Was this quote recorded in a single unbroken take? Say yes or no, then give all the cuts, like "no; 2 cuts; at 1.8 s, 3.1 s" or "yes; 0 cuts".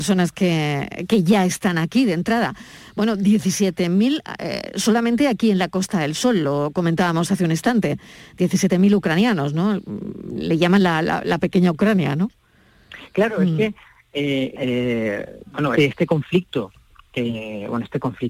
no; 2 cuts; at 14.6 s, 15.8 s